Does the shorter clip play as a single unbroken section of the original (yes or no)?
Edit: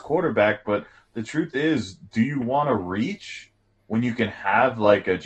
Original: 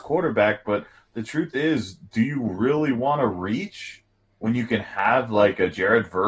no